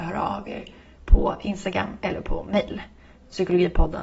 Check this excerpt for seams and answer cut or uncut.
uncut